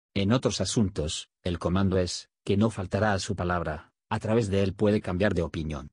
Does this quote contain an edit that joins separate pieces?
no; 0 cuts

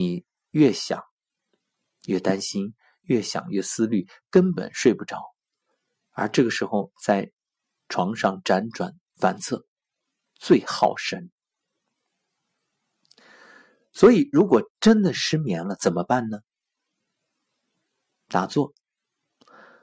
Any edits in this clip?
no; 0 cuts

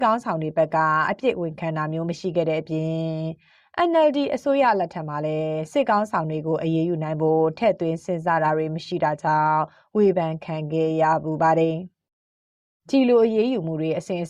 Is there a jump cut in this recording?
no; 0 cuts

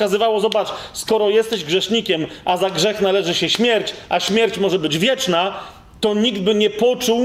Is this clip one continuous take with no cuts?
yes; 0 cuts

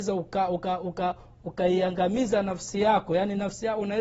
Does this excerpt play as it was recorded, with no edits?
yes; 0 cuts

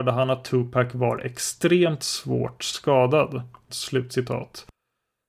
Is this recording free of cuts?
no; 1 cut; at 3.7 s

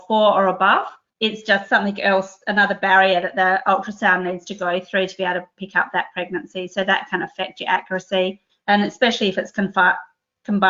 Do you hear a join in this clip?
yes; 1 cut; at 1.1 s

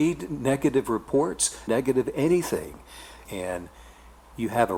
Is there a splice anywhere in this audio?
yes; 2 cuts; at 1.7 s, 3.3 s

